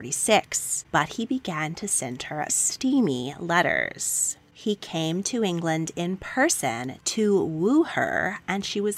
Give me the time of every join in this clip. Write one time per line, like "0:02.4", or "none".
0:02.5